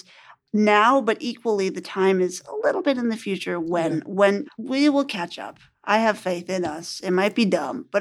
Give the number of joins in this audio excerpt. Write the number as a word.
one